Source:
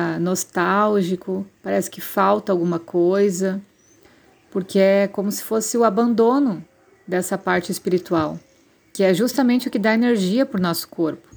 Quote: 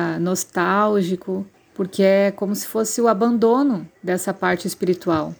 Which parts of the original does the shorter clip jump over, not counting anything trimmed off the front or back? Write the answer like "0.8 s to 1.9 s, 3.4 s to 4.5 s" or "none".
1.5 s to 4.3 s, 6.7 s to 7.0 s